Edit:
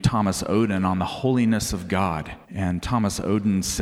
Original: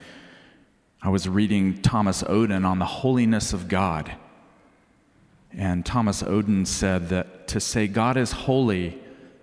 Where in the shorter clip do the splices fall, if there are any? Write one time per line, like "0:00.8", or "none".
0:02.4